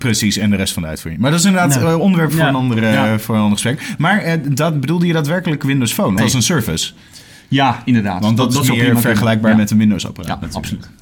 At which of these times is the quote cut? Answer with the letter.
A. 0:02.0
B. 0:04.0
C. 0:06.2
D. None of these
C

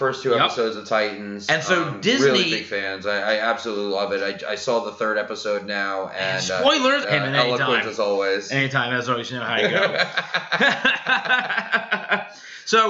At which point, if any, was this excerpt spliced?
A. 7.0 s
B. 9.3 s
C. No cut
A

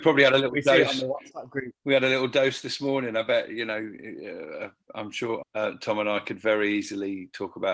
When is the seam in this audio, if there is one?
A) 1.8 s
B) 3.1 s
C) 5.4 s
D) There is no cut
C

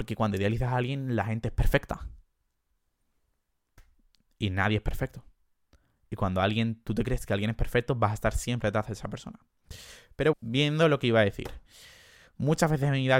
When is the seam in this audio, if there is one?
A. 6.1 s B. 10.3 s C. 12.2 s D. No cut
B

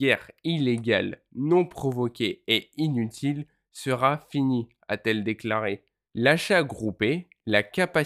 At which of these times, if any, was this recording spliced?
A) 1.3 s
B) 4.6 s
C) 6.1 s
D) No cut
C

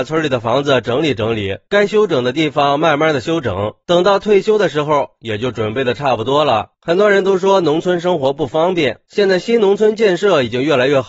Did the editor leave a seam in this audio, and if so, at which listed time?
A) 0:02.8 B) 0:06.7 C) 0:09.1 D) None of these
C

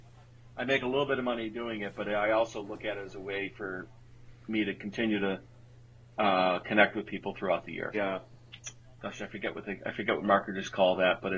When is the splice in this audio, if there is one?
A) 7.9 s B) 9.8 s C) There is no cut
A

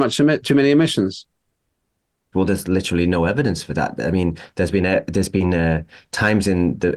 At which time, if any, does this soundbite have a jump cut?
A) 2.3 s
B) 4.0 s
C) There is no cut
A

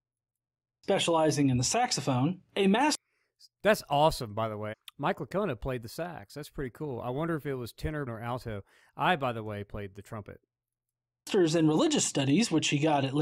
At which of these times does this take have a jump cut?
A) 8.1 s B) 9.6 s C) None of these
A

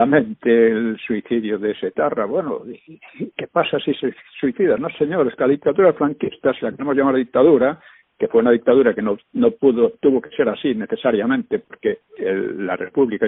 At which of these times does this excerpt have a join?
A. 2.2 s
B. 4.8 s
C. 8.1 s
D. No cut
B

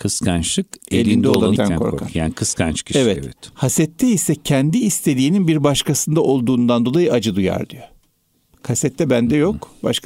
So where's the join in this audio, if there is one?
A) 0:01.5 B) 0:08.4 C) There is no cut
A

